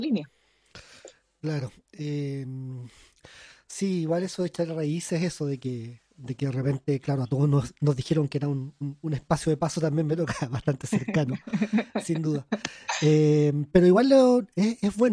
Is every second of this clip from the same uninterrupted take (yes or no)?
yes